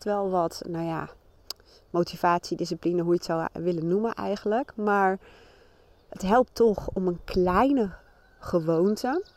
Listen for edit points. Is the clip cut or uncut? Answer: uncut